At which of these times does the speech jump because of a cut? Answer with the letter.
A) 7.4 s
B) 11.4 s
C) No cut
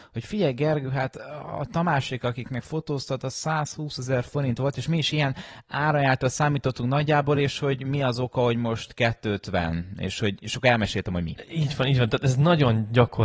C